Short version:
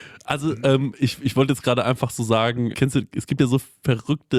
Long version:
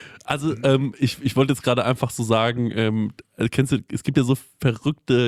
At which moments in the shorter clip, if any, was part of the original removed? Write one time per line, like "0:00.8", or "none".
0:02.7